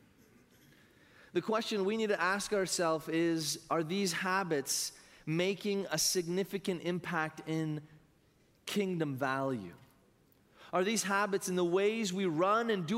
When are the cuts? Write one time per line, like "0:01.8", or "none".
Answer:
none